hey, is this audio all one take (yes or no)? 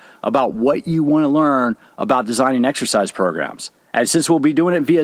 no